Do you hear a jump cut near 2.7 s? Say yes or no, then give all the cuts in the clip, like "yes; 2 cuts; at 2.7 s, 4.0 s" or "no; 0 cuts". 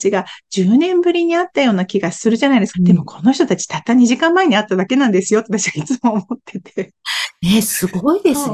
yes; 1 cut; at 2.7 s